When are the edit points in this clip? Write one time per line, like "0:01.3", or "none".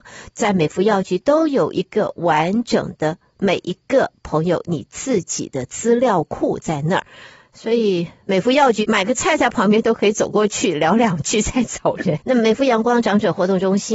0:08.8
0:12.2